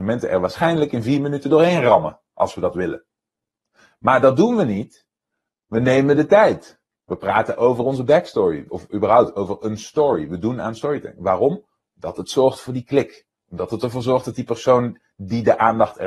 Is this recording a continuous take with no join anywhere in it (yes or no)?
no